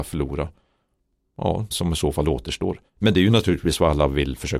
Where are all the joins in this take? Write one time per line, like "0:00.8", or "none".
0:01.7
0:02.9